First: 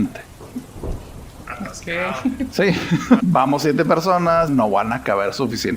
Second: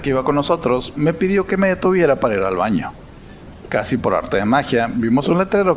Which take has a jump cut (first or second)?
first